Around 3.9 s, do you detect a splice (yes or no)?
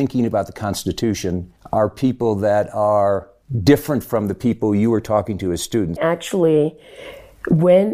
no